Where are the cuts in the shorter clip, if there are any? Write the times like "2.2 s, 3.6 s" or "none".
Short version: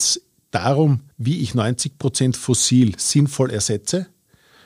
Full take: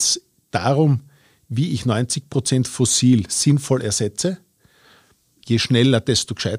1.1 s